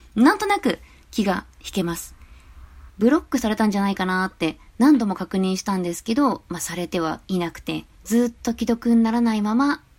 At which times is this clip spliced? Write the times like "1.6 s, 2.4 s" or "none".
2.9 s, 7.9 s

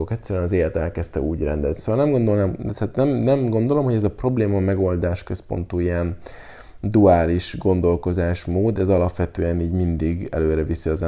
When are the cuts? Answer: 1.8 s

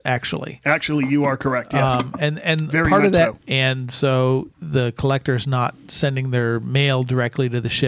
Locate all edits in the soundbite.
3.4 s, 4.5 s

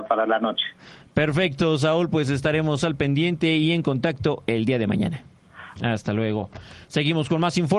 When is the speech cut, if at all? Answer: 5.8 s

